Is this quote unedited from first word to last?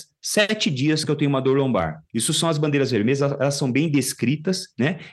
no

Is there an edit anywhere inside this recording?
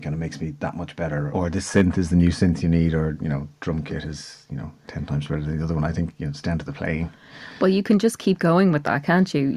no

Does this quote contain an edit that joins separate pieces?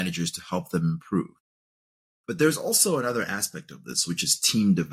no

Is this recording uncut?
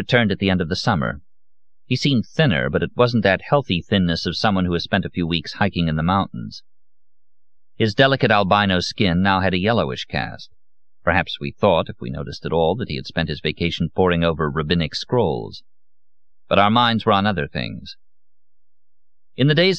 yes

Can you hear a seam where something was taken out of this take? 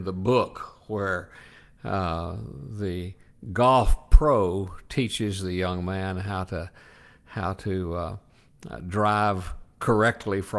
no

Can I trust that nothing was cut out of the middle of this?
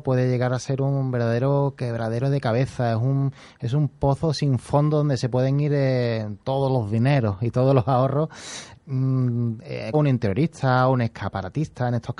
no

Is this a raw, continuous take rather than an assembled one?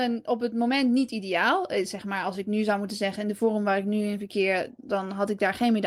yes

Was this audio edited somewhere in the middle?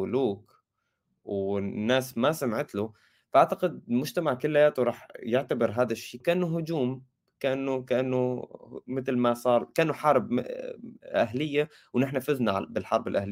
yes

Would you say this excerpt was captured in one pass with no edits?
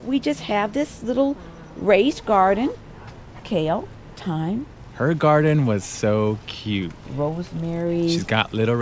yes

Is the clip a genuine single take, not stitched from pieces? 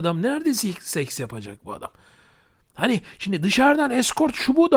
yes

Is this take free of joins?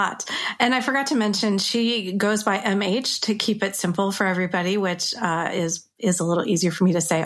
yes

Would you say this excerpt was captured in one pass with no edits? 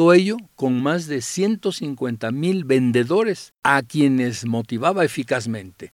no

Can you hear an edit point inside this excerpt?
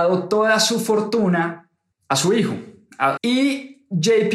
yes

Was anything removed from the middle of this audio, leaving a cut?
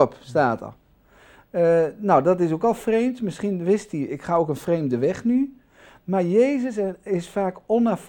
no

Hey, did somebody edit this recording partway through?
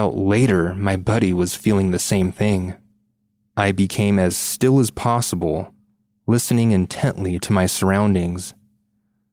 no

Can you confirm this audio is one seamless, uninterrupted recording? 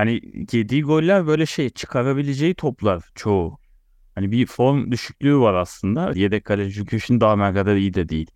no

